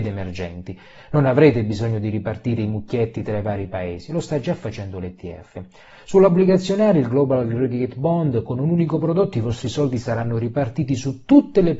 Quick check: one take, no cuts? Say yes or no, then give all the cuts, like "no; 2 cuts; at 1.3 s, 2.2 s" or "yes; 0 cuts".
yes; 0 cuts